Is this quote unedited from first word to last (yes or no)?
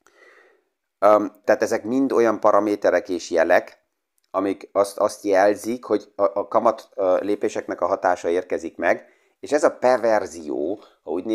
no